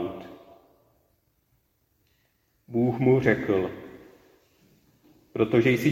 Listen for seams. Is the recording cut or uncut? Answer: cut